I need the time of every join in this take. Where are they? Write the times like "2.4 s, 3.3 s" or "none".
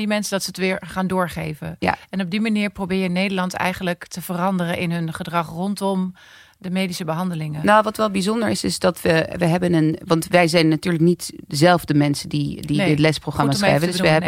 none